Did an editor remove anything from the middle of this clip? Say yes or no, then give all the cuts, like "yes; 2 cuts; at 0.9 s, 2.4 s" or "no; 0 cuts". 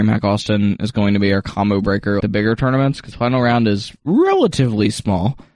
yes; 1 cut; at 2.2 s